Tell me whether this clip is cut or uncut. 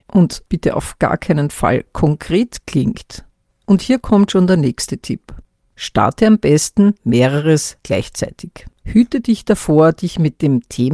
cut